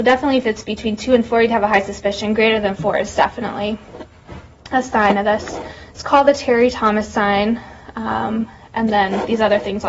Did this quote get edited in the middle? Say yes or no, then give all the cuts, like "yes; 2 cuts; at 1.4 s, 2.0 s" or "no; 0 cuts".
no; 0 cuts